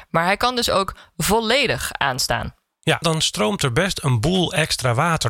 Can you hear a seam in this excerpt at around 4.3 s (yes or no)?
no